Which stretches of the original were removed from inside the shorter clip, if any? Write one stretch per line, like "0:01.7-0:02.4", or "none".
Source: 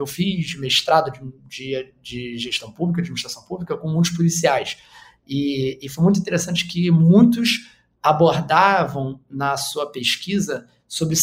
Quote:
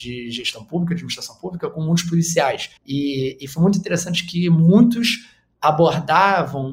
0:04.8-0:05.2